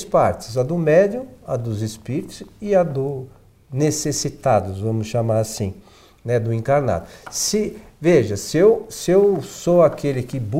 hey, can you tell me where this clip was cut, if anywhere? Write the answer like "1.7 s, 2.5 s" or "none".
none